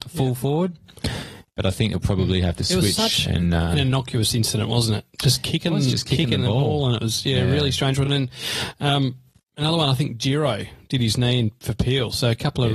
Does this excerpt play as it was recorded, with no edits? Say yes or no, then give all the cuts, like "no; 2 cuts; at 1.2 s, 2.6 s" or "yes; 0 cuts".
yes; 0 cuts